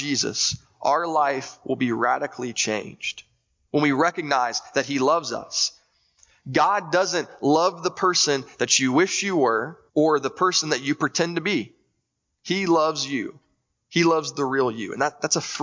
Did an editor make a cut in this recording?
yes; 1 cut; at 9.9 s

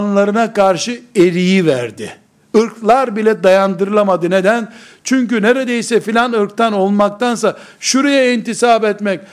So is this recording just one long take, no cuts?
yes; 0 cuts

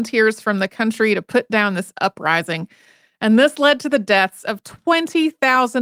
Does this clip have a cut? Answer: no; 0 cuts

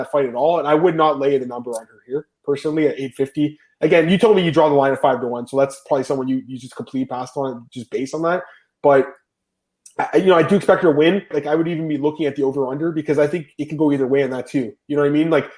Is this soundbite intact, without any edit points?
no; 1 cut; at 11.3 s

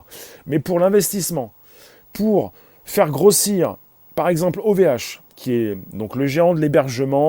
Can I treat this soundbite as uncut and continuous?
yes; 0 cuts

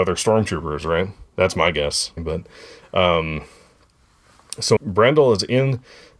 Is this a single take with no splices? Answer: no; 2 cuts; at 2.2 s, 4.8 s

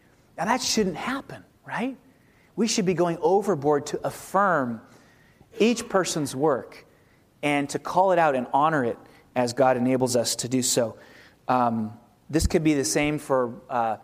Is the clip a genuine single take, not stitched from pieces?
yes; 0 cuts

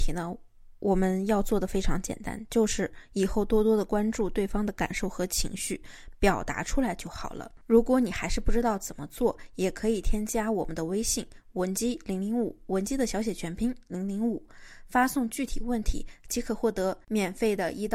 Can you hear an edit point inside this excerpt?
no; 0 cuts

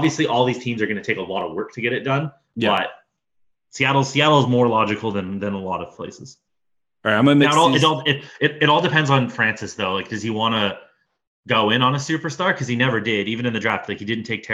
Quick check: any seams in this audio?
no; 0 cuts

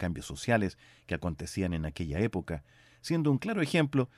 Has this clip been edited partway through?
no; 0 cuts

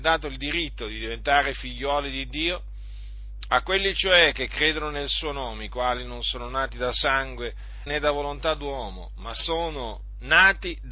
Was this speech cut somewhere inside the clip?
yes; 1 cut; at 7.9 s

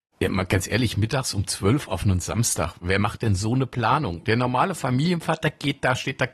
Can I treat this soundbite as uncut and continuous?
no; 1 cut; at 4.2 s

